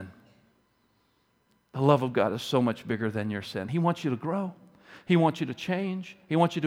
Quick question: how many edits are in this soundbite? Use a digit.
0